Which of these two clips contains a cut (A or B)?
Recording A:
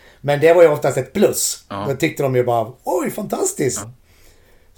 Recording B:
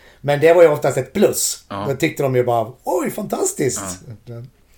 A